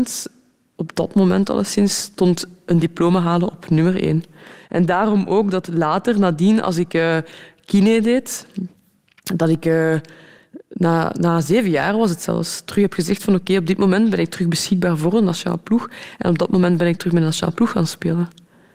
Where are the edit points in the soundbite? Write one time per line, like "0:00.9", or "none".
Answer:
none

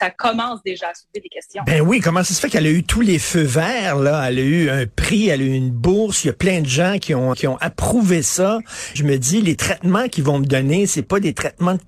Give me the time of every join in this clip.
0:07.3
0:09.0

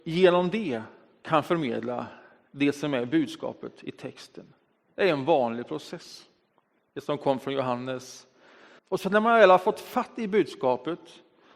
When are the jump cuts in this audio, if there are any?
0:06.8
0:08.8

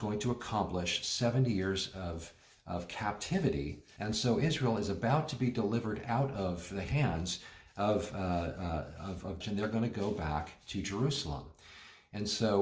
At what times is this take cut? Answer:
0:04.0
0:09.4

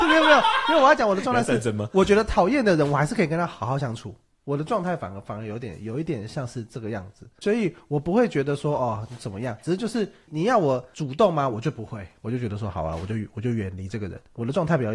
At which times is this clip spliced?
none

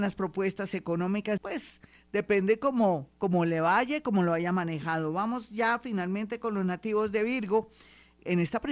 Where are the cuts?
0:01.4

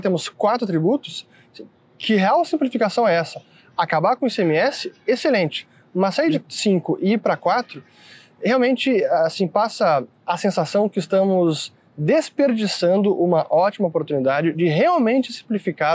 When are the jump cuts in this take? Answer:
none

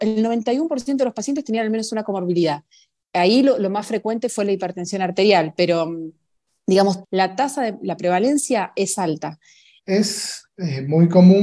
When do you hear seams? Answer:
0:07.0
0:09.8

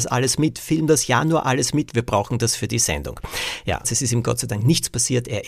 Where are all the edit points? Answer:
0:03.8

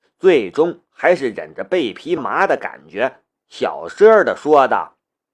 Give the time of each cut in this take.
0:02.2

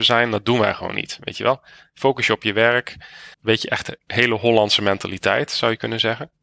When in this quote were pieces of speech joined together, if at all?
0:03.3

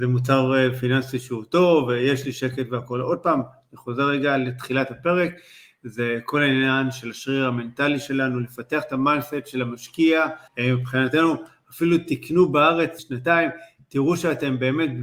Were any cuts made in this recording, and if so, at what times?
0:10.5
0:13.0

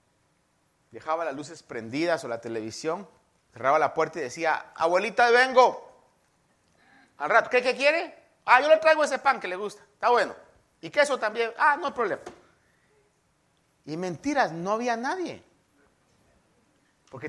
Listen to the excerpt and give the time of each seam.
none

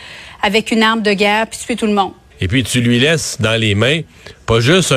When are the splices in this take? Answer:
0:02.3

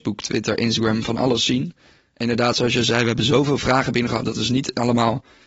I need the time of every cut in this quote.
none

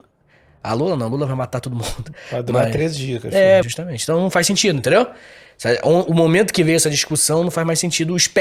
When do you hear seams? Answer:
0:03.6

